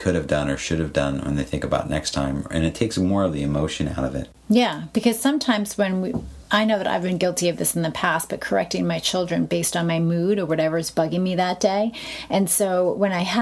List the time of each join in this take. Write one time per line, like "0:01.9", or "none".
none